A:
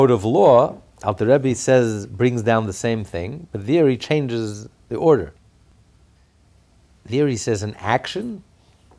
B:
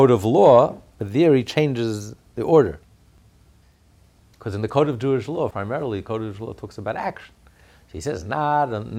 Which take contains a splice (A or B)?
B